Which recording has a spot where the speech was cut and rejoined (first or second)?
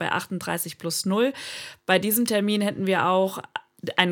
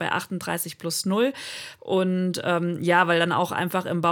second